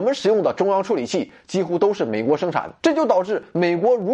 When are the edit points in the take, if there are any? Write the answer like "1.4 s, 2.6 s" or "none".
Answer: 2.8 s